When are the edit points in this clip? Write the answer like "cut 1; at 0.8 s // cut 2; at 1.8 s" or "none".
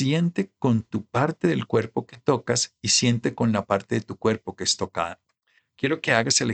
cut 1; at 5.6 s